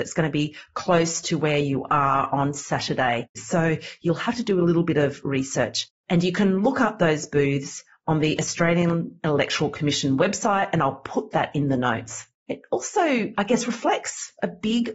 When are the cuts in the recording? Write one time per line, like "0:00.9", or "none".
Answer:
0:03.3
0:12.4